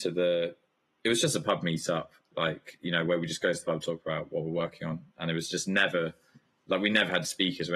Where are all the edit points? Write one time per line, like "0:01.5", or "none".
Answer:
none